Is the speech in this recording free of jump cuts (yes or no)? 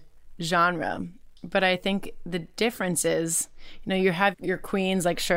no